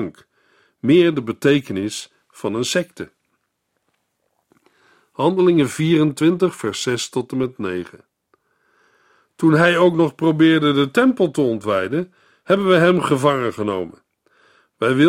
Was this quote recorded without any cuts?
yes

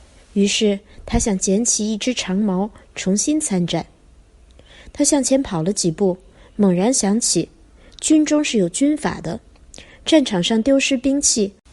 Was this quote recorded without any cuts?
yes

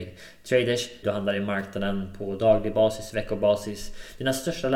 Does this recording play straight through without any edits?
no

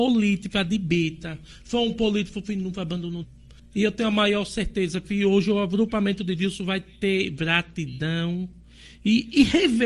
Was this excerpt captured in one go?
no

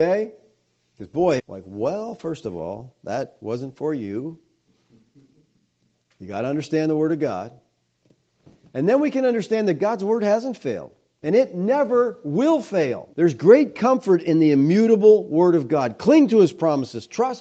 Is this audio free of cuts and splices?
no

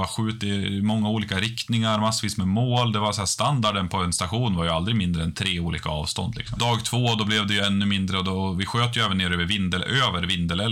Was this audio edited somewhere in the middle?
yes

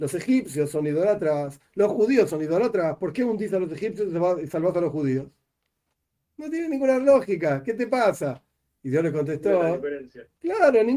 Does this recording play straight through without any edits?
yes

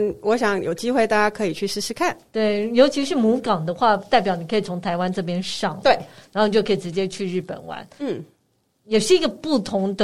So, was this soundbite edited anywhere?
no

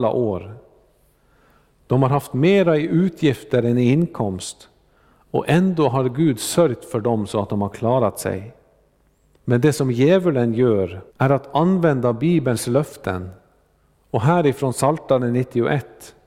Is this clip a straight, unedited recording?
no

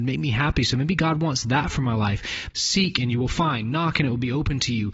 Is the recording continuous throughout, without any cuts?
no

